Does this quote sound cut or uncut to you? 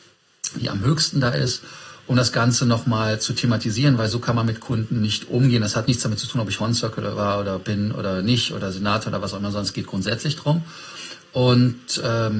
uncut